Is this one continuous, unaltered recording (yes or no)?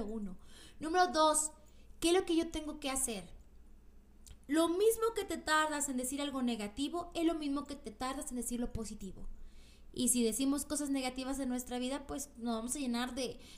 no